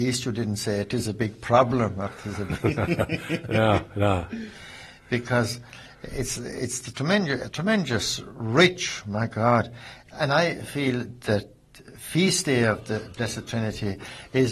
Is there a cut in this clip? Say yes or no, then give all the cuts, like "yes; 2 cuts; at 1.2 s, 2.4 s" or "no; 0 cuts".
no; 0 cuts